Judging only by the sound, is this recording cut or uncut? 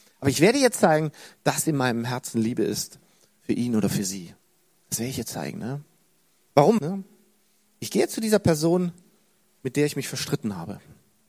cut